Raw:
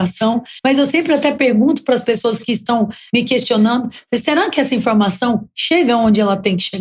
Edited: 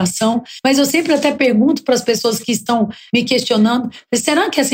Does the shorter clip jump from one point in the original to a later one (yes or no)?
no